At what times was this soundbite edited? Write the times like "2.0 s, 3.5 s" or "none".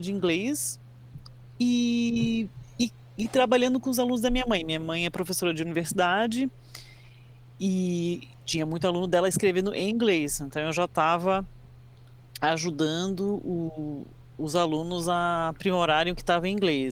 none